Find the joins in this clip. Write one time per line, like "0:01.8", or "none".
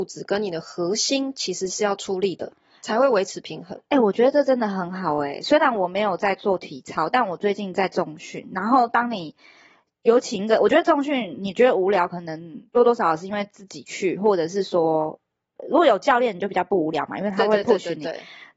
none